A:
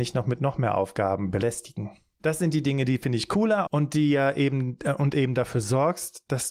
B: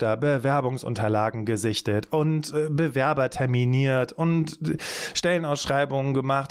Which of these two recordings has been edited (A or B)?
A